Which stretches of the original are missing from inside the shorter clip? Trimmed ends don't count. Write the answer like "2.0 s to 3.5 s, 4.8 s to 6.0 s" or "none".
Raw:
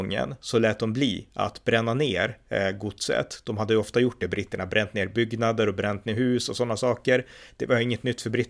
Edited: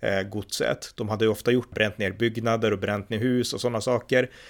4.2 s to 4.7 s

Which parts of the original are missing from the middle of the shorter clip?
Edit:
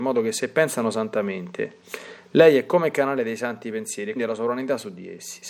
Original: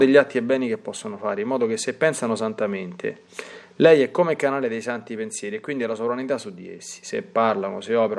5.6 s to 5.8 s

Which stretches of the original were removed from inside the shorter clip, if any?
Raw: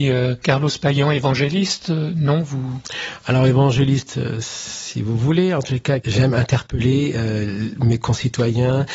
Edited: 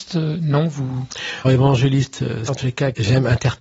3.2 s to 3.4 s, 4.4 s to 5.6 s

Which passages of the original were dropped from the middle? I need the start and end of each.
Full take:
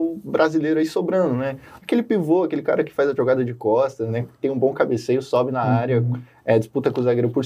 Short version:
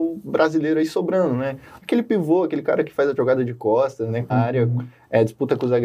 4.3 s to 5.6 s

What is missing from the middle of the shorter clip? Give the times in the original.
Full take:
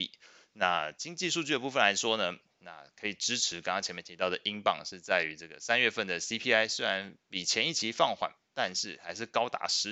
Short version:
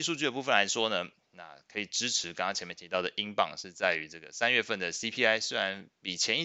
none

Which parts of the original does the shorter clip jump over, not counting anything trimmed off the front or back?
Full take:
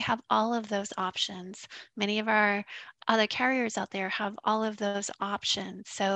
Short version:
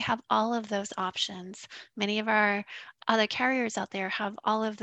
none

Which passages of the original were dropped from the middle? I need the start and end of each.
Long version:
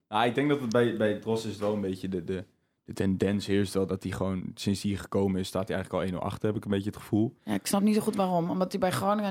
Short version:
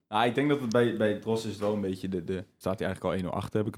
2.6 s to 5.5 s

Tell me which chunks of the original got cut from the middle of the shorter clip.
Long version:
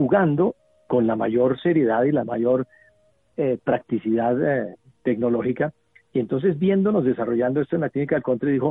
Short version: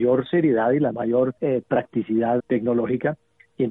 2.7 s to 3.3 s, 4.4 s to 5.0 s

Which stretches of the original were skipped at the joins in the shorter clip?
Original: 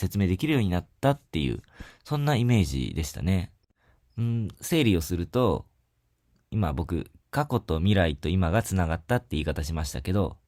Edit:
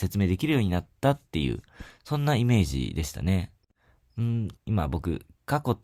4.6 s to 6.4 s

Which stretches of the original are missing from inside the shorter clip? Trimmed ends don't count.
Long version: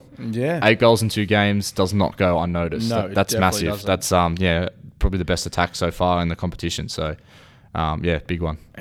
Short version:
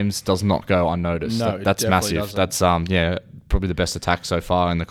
none

